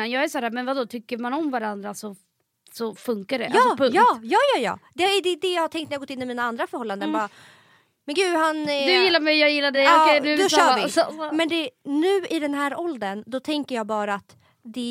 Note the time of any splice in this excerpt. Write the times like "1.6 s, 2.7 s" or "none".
none